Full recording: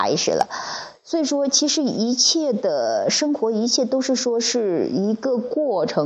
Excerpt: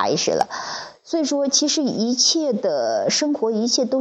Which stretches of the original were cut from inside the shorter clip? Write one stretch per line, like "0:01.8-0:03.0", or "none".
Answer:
none